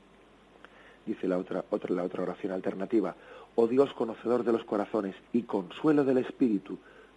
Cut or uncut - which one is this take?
cut